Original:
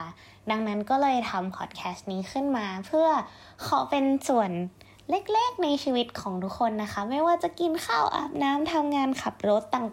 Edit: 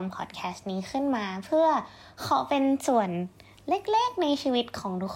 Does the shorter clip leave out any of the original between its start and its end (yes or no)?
no